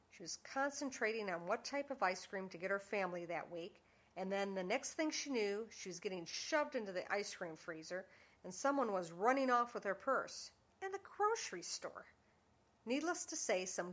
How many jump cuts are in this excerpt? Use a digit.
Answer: 0